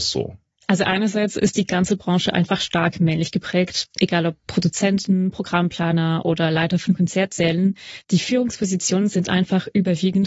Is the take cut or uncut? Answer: uncut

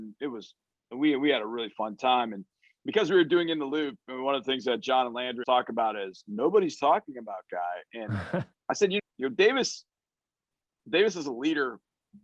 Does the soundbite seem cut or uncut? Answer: cut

